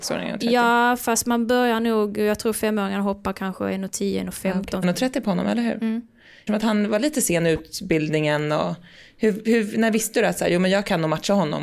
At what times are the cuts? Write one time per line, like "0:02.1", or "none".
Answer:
0:04.8
0:06.5